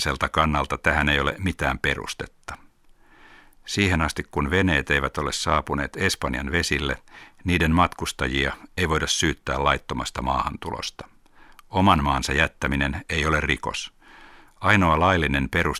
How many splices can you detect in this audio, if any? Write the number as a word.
one